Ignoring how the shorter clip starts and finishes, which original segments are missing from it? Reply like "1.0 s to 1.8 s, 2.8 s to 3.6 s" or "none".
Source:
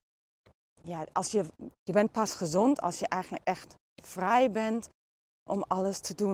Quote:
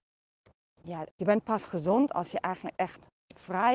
1.1 s to 1.8 s